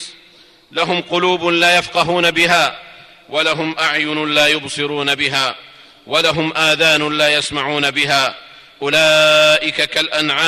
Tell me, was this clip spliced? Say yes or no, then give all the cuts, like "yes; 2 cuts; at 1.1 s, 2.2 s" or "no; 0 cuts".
no; 0 cuts